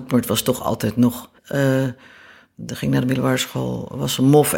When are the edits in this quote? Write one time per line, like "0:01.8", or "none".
0:01.4